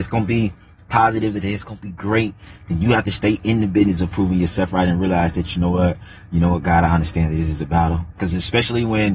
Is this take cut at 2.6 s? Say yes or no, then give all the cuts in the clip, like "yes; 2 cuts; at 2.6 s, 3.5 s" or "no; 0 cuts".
no; 1 cut; at 8.1 s